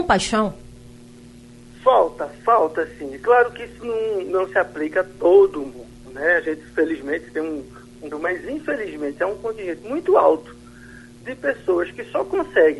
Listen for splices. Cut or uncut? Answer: cut